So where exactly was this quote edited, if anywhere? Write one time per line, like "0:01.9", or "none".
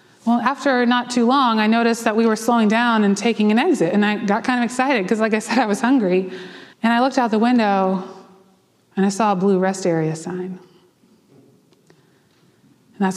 0:06.7